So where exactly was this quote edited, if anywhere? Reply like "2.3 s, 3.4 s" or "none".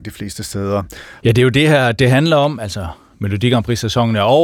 1.2 s